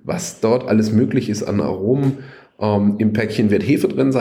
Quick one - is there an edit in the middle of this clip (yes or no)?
no